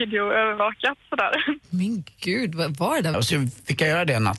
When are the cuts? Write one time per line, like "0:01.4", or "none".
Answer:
0:03.1